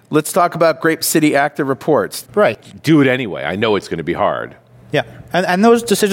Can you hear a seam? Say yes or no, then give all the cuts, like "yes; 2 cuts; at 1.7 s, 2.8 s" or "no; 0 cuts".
yes; 1 cut; at 2.2 s